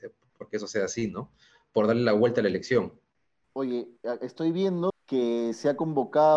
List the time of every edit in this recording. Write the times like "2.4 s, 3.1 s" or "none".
3.4 s, 4.9 s